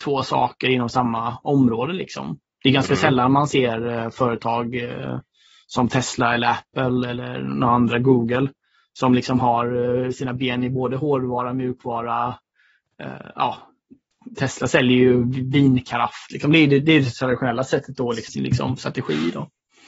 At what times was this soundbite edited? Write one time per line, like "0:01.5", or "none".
0:16.3
0:18.3